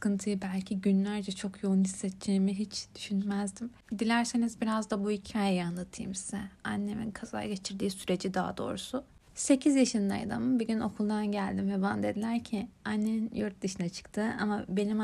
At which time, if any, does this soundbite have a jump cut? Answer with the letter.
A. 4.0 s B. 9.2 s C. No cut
C